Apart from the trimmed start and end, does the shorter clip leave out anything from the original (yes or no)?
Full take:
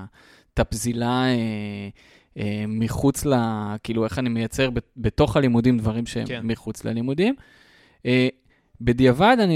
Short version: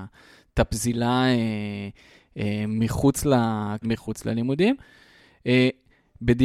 yes